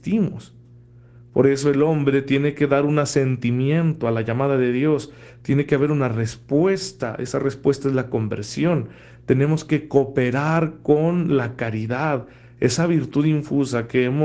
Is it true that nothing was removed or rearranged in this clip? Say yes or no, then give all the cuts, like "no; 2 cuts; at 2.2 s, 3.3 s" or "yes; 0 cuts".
yes; 0 cuts